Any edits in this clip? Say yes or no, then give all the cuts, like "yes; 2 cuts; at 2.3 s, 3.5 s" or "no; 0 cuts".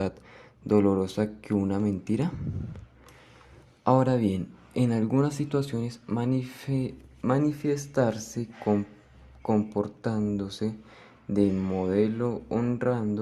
no; 0 cuts